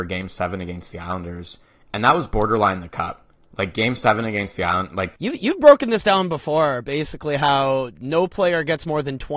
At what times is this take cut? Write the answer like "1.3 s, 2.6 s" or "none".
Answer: none